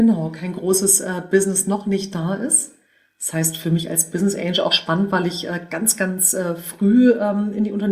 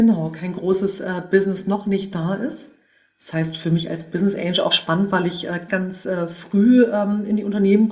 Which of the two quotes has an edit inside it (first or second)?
second